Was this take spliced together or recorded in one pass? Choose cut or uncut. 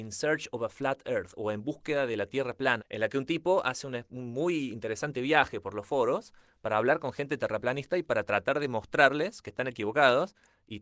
cut